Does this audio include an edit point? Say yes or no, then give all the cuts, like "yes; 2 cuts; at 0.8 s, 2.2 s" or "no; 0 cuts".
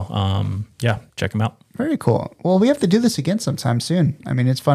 yes; 1 cut; at 1.1 s